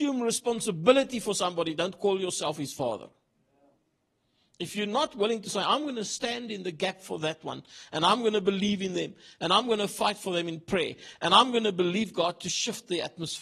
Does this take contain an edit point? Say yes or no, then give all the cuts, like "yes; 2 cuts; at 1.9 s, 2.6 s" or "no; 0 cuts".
no; 0 cuts